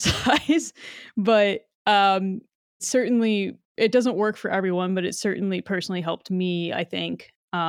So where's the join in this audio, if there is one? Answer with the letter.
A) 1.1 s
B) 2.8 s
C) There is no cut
B